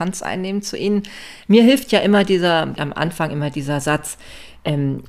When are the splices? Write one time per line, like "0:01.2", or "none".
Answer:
0:01.5
0:02.8